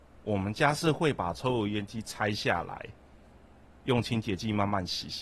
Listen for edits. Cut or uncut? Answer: uncut